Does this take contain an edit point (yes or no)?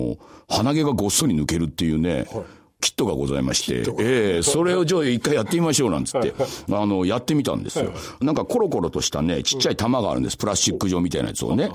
no